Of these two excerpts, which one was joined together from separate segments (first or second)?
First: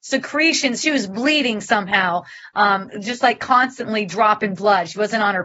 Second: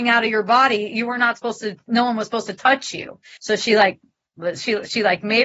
second